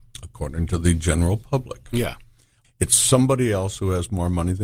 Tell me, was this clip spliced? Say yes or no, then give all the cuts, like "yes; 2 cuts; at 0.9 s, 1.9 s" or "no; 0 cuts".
yes; 1 cut; at 2.6 s